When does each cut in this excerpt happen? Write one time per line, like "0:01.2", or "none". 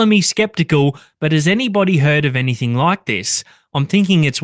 none